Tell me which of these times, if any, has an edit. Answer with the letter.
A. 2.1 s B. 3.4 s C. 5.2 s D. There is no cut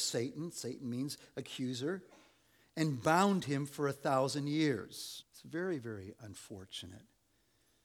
C